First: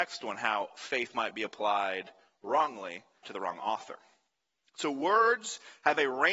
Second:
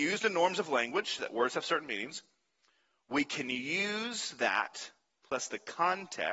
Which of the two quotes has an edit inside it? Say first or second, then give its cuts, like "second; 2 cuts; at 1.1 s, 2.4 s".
first; 1 cut; at 3.2 s